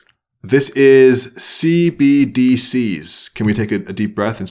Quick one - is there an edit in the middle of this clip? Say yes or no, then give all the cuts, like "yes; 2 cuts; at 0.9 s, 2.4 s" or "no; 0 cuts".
no; 0 cuts